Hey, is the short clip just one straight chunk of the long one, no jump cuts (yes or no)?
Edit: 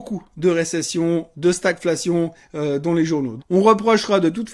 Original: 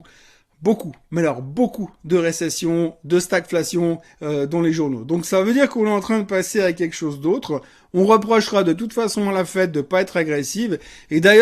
no